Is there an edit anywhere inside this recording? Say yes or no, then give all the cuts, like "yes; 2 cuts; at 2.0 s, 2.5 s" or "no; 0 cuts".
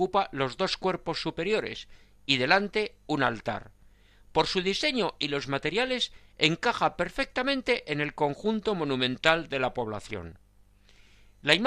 no; 0 cuts